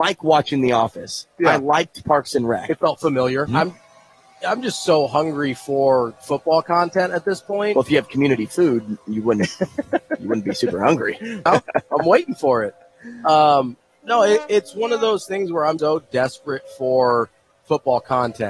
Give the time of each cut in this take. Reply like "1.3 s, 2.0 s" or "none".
3.5 s, 11.5 s, 15.8 s